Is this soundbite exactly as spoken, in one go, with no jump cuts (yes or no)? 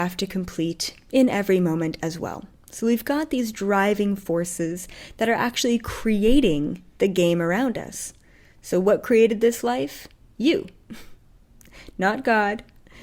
yes